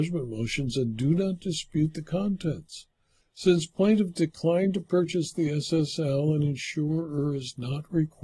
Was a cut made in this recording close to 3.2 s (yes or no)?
yes